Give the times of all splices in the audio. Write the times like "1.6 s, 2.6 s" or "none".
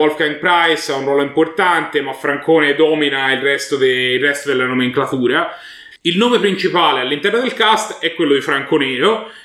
5.9 s